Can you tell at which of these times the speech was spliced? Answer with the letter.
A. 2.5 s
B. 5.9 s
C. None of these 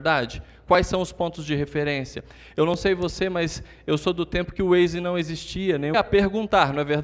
B